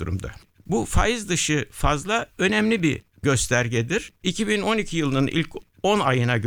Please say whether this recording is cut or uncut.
cut